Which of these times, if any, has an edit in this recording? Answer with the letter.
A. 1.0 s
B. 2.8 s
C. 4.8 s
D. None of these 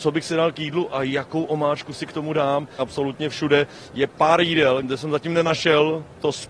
B